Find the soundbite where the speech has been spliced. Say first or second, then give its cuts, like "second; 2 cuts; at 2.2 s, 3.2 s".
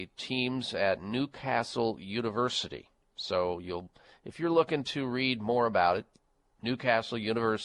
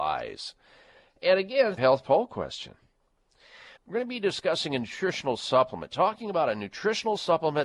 second; 2 cuts; at 1.8 s, 3.8 s